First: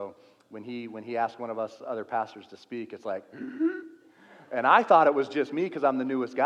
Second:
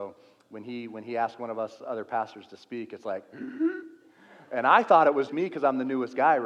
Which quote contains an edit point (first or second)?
second